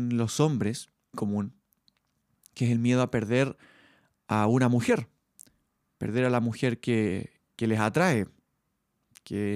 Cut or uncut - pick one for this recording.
cut